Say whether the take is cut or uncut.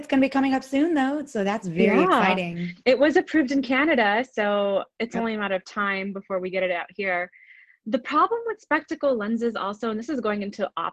uncut